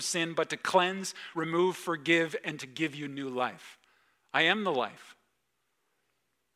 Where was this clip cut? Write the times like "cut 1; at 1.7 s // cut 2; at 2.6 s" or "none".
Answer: none